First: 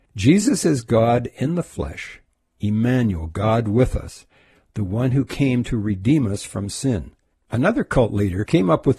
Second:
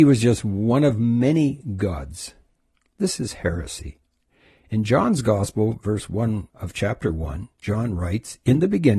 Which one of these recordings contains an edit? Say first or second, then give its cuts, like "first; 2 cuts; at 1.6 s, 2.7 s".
first; 1 cut; at 7.3 s